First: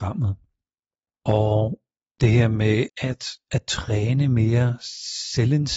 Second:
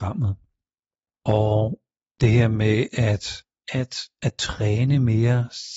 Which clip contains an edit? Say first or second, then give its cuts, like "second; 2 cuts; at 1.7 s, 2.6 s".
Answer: first; 1 cut; at 2.9 s